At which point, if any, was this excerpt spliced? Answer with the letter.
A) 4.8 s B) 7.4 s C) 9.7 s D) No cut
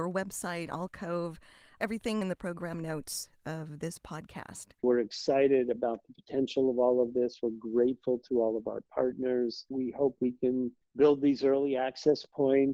A